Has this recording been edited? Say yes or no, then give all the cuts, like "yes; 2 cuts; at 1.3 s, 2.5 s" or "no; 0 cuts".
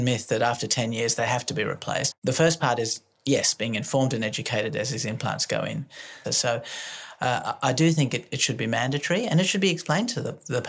yes; 2 cuts; at 2.1 s, 6.2 s